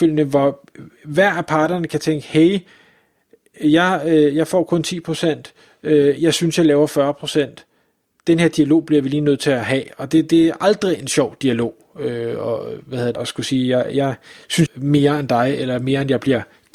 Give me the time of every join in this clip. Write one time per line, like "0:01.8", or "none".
0:13.1
0:14.7